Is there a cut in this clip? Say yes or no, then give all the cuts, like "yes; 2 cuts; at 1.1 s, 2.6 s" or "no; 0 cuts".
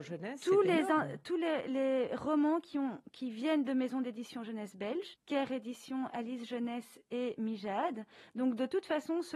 yes; 1 cut; at 5.1 s